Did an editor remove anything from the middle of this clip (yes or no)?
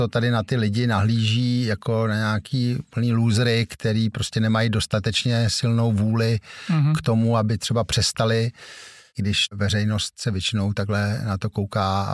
no